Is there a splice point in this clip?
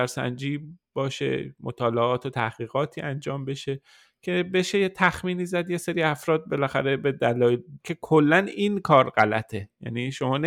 yes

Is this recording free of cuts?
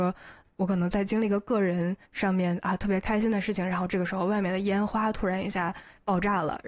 yes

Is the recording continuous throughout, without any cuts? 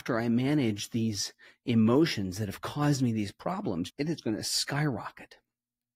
no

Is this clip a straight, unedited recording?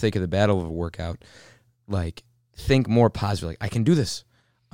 yes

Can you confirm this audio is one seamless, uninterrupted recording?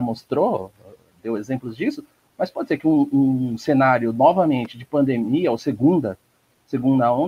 yes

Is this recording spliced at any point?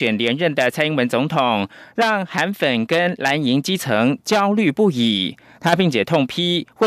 yes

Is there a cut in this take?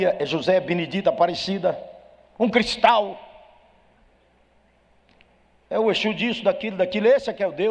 no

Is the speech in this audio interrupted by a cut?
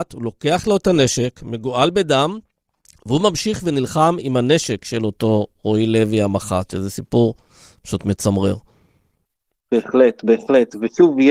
no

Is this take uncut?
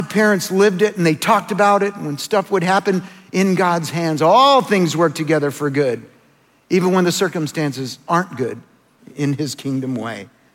no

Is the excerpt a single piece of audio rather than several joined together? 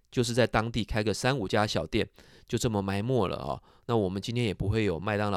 yes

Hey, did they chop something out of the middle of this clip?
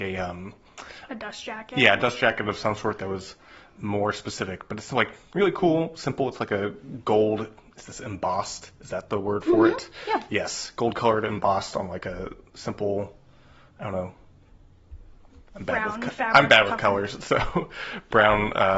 yes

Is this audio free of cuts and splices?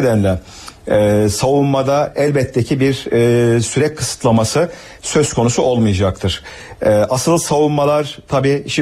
yes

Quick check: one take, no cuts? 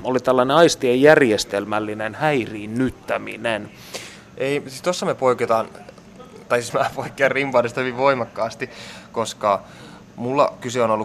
no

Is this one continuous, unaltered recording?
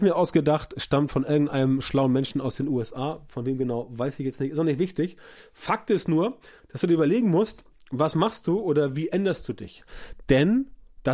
yes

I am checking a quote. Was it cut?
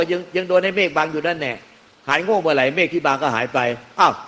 no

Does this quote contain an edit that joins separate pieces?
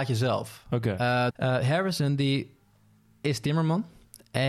yes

